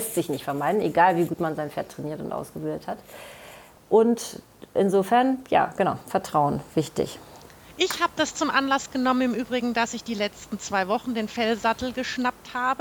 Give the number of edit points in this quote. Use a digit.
1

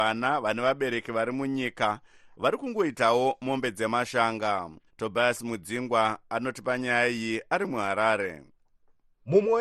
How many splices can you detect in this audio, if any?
1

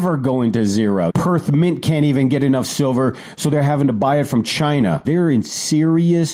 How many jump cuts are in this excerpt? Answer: 2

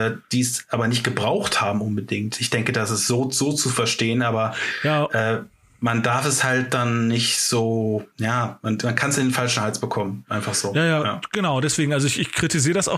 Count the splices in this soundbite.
1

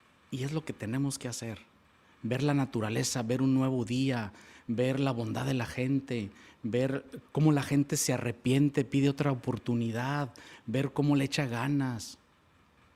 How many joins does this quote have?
1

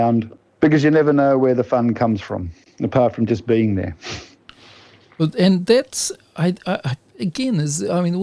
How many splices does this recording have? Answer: 0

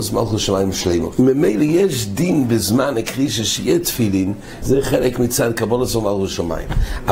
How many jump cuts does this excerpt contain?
2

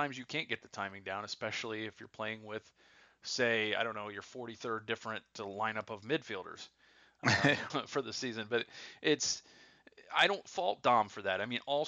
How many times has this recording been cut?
1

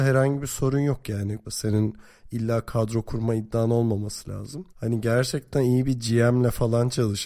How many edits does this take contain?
2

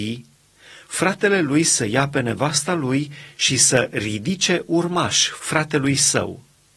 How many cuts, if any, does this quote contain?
0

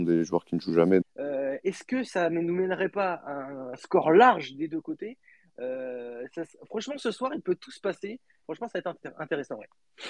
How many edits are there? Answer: 2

